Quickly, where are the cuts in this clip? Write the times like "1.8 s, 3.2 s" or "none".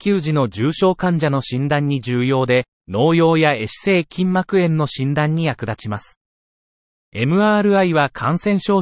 2.7 s